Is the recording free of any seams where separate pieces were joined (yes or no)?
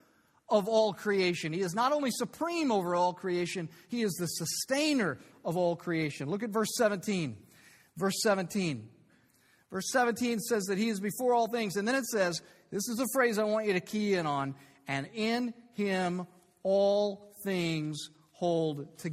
yes